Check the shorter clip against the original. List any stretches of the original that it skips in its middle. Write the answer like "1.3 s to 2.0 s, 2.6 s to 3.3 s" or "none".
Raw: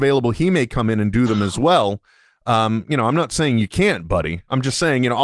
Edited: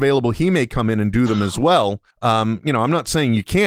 2.1 s to 2.3 s